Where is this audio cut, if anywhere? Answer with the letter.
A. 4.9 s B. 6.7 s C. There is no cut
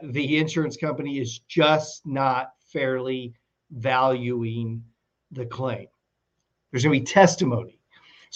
B